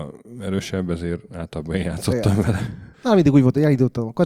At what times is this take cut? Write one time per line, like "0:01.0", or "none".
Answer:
0:02.9